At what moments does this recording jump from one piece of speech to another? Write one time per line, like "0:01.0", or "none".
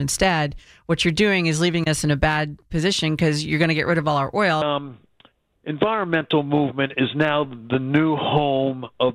0:04.6